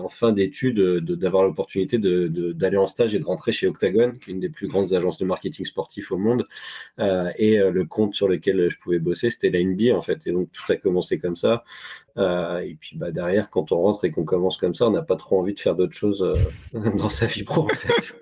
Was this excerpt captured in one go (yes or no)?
yes